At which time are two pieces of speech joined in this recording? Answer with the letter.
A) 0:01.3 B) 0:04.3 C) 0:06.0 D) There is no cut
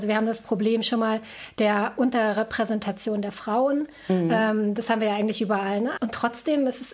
C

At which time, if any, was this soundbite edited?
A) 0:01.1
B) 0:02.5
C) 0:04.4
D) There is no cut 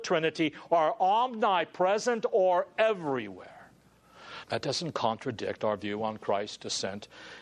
C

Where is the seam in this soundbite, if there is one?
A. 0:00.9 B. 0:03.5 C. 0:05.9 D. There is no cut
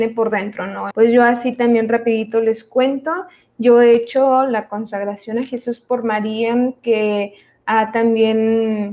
A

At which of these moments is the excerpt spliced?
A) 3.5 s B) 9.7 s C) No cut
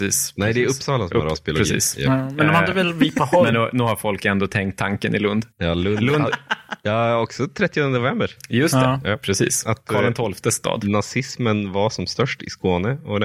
C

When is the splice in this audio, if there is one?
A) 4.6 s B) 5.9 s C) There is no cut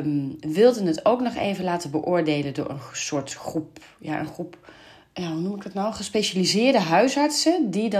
C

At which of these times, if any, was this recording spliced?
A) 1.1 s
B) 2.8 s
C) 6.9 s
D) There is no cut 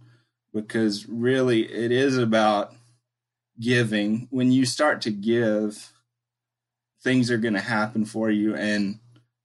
C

